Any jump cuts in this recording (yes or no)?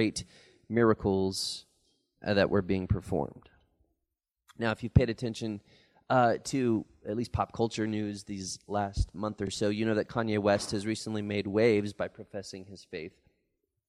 no